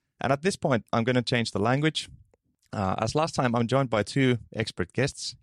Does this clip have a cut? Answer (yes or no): no